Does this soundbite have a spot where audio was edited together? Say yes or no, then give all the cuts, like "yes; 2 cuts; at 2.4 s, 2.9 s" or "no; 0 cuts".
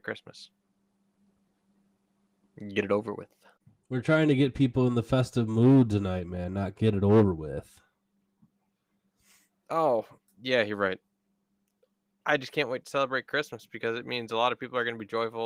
no; 0 cuts